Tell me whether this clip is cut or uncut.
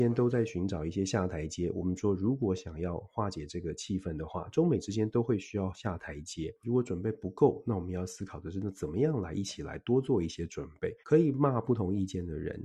cut